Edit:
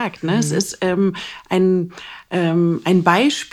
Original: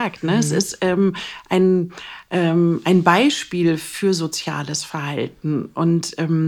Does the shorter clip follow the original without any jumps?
yes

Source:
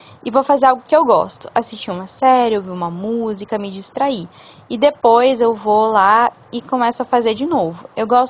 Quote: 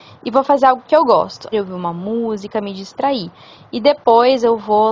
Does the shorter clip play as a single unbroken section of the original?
no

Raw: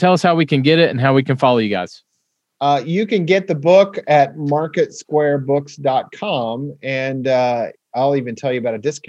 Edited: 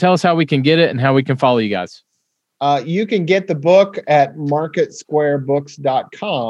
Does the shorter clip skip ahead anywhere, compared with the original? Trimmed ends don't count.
no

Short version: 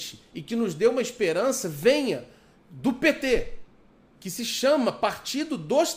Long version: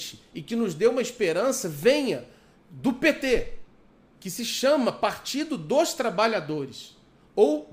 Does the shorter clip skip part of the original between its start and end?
no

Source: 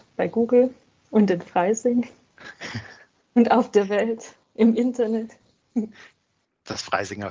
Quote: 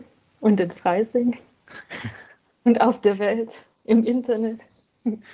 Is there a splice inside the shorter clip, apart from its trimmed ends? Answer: no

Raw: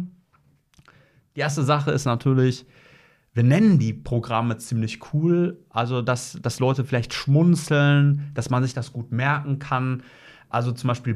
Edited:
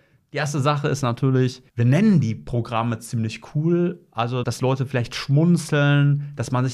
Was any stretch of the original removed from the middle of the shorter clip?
yes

